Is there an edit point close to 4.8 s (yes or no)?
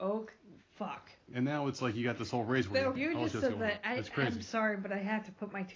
no